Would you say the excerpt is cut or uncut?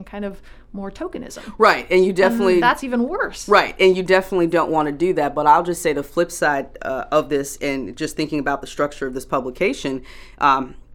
uncut